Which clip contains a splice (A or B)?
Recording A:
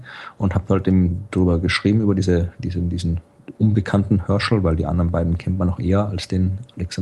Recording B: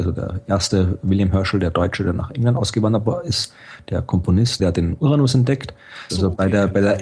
B